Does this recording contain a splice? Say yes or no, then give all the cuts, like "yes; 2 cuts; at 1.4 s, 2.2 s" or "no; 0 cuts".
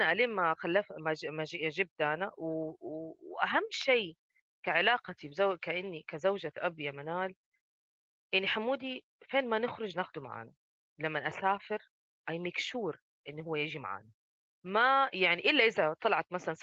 no; 0 cuts